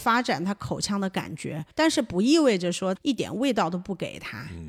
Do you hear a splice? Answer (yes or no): yes